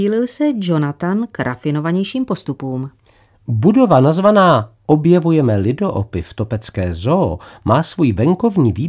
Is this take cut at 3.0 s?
no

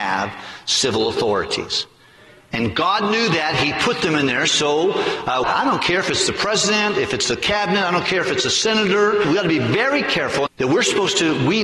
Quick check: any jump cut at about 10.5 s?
yes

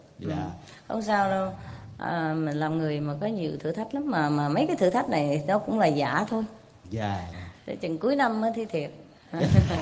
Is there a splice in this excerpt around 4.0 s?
no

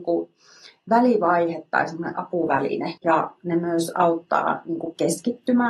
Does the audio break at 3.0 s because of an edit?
yes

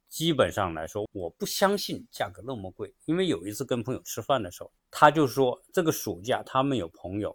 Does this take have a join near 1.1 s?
yes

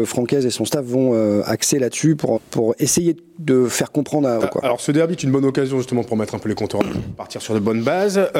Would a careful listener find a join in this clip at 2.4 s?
yes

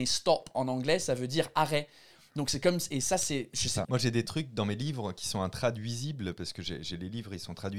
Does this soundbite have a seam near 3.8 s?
yes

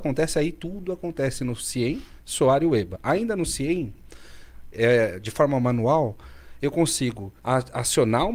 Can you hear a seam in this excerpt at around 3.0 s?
no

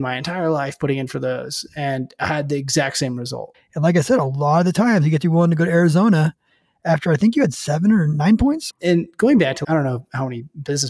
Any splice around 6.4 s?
no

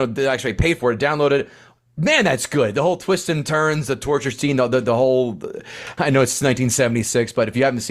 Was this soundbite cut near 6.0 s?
yes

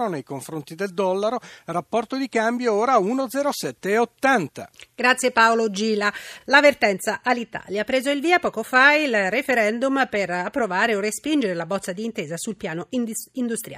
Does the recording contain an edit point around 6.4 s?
no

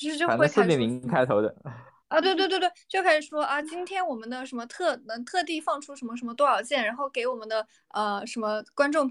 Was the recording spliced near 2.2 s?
yes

